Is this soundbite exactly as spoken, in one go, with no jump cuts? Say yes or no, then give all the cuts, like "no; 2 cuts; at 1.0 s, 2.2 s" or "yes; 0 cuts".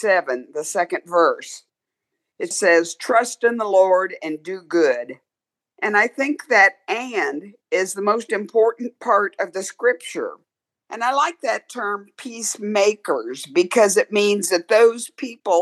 no; 2 cuts; at 2.5 s, 10.9 s